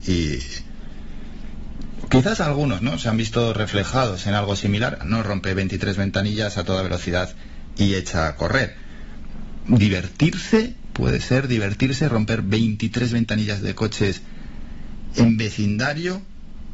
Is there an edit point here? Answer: yes; 2 cuts; at 5.0 s, 9.7 s

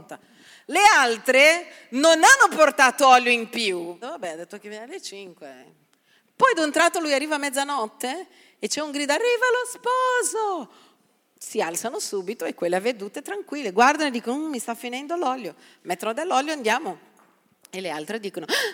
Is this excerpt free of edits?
no; 1 cut; at 4.0 s

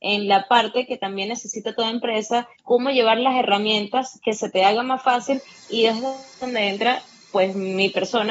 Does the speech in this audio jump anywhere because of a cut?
yes; 1 cut; at 2.6 s

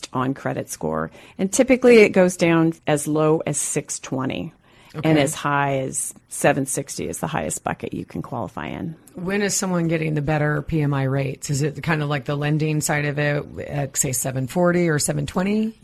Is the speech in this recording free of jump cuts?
no; 2 cuts; at 2.8 s, 13.9 s

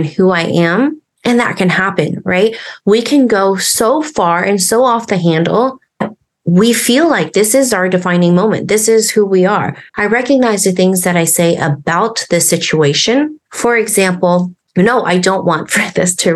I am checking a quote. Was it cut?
yes; 1 cut; at 9.9 s

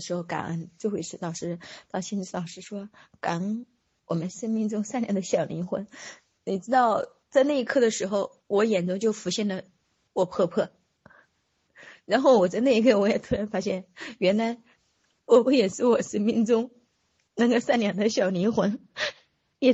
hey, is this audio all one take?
no; 1 cut; at 15.4 s

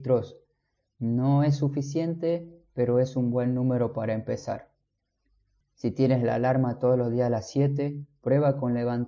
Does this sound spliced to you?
yes; 1 cut; at 5.6 s

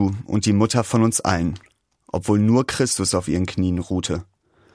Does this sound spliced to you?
no; 0 cuts

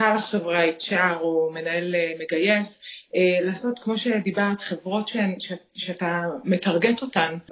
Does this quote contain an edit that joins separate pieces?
no; 0 cuts

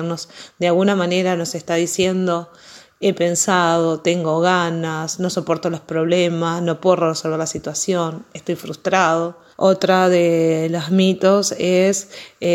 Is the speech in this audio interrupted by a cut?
yes; 1 cut; at 9.5 s

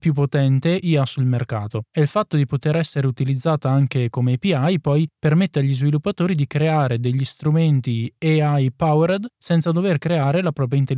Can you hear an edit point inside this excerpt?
no; 0 cuts

